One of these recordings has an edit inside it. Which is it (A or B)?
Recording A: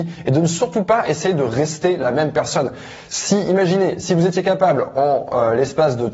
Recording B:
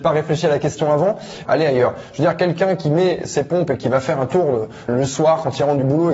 B